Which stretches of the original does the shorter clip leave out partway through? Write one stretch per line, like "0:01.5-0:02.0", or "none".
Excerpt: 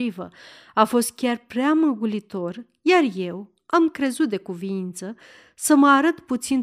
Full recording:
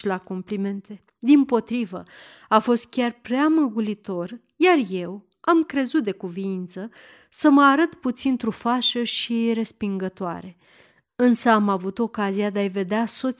none

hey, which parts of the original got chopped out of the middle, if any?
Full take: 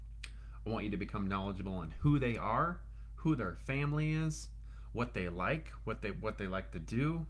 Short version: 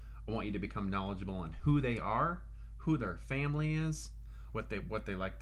0:04.9-0:05.8

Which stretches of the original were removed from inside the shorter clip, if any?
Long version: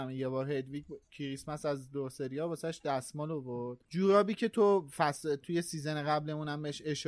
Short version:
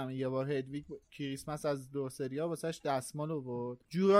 none

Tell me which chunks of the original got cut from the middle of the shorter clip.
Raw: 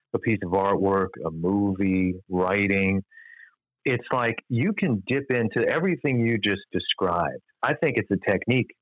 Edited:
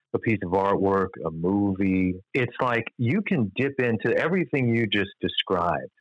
0:02.2-0:03.7

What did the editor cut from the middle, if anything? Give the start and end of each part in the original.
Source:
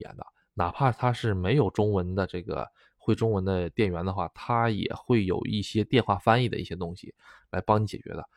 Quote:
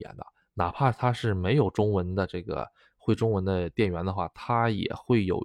none

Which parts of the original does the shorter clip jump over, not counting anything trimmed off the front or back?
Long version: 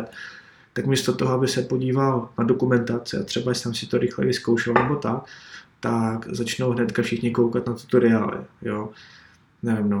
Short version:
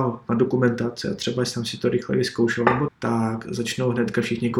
0:05.0-0:05.7

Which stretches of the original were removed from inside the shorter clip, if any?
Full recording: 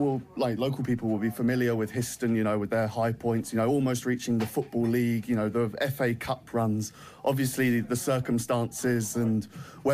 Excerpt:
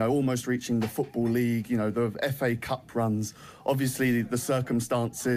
none

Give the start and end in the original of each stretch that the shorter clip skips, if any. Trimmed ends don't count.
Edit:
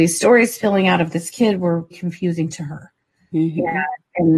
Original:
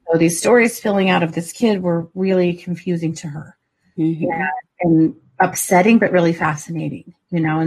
0:02.1-0:02.5

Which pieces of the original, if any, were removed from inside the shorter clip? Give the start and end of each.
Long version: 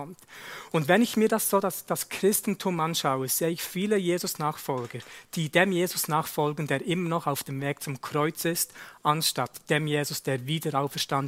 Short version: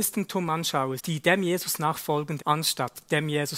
0:03.3-0:05.3
0:06.7-0:09.0

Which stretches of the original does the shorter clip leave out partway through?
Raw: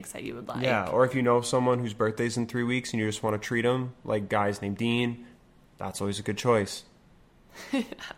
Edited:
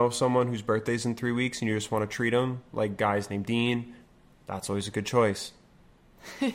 none

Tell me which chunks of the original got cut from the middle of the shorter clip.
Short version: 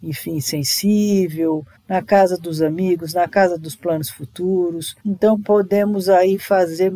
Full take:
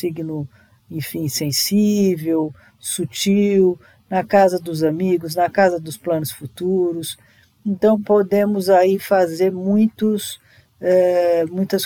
0:02.6-0:04.0
0:07.2-0:07.6

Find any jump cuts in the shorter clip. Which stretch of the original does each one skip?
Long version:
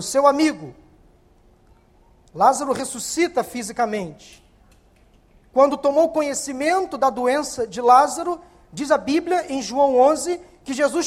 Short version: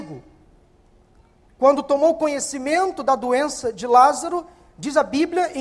0:02.0-0:05.4

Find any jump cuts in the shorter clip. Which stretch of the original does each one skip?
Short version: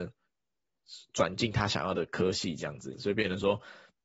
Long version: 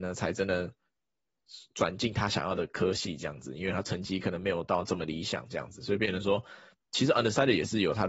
0:03.5-0:05.8

